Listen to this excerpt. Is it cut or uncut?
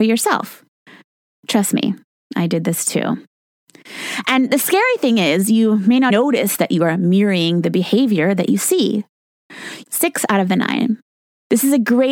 cut